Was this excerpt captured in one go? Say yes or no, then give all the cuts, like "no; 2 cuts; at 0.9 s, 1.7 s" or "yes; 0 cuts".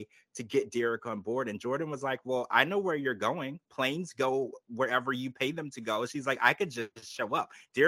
yes; 0 cuts